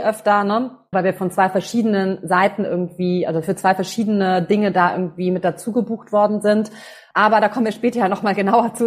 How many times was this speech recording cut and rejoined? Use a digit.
2